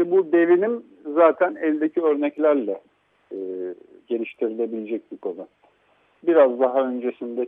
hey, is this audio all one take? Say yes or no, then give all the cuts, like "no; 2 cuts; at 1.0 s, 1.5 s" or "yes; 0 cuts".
yes; 0 cuts